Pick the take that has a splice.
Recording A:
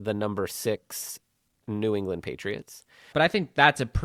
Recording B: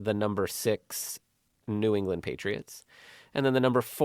A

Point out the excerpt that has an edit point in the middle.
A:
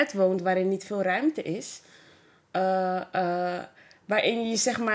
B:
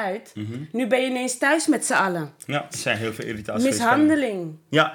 B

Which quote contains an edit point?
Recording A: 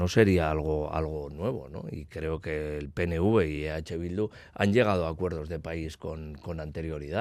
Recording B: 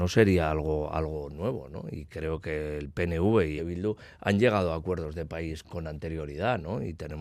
B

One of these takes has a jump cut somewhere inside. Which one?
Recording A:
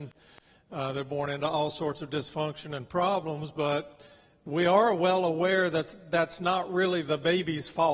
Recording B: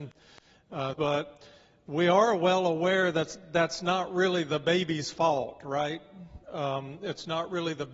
B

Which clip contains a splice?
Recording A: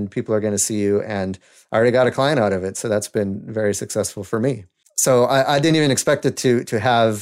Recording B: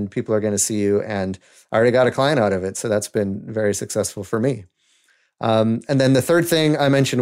A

